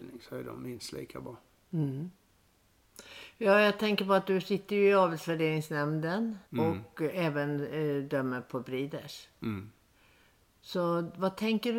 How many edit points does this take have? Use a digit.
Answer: 1